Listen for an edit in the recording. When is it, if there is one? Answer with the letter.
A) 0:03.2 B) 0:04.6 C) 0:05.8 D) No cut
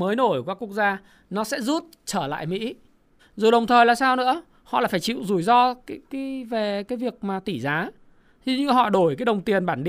A